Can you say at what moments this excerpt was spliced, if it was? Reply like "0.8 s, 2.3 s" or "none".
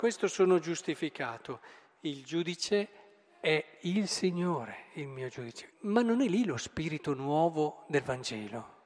5.7 s